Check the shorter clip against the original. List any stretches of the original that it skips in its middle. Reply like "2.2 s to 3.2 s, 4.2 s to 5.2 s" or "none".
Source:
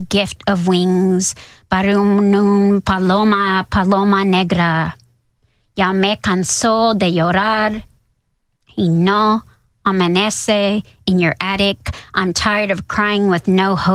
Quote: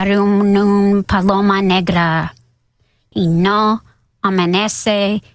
2.8 s to 3.7 s, 5.8 s to 8.7 s